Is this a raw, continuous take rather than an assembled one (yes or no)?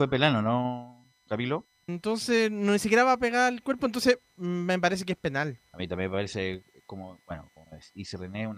no